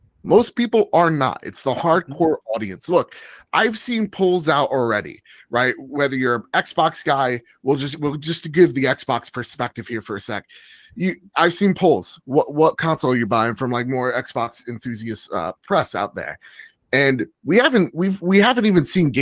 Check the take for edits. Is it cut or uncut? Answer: uncut